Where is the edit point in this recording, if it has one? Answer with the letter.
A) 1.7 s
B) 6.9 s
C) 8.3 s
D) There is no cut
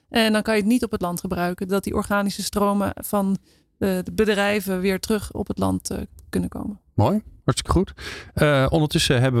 A